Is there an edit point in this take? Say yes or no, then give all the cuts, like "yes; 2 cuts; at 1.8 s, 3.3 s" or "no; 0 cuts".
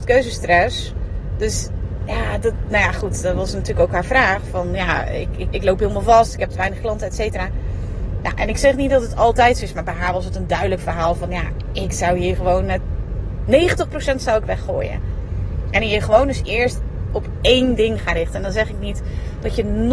yes; 1 cut; at 5.5 s